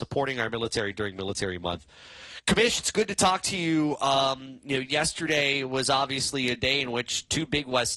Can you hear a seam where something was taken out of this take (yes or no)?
no